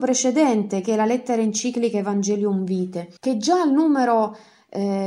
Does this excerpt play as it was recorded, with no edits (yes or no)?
no